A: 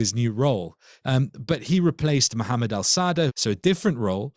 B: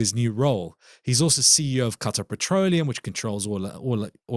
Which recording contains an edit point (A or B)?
A